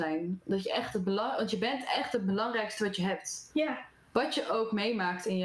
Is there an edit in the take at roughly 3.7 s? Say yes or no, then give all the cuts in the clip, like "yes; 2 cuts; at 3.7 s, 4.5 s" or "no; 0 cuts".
no; 0 cuts